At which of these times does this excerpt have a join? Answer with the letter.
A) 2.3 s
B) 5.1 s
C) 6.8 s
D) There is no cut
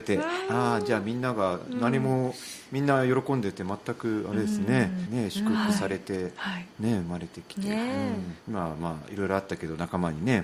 B